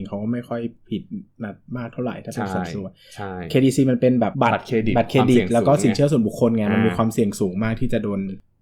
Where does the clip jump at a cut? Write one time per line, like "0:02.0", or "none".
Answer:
0:04.3